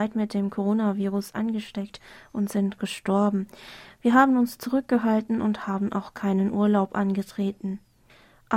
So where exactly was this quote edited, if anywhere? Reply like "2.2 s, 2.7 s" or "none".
none